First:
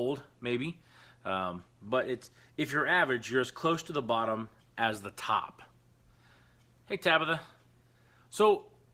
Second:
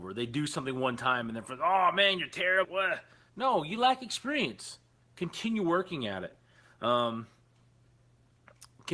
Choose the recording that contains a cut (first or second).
second